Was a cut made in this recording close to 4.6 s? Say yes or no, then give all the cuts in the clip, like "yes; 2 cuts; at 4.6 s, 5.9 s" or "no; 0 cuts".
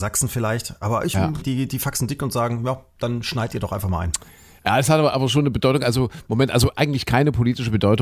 no; 1 cut; at 1.4 s